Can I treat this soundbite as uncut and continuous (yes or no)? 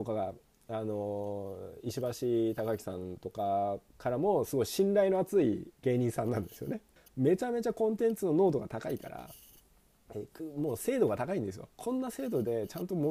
no